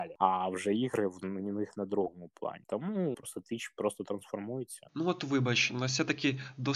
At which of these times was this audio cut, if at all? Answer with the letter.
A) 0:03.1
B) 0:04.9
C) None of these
A